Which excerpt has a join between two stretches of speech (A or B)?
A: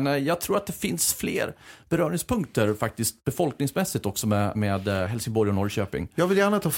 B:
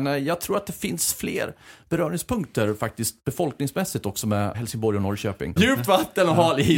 B